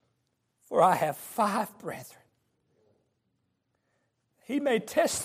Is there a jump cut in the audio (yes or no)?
no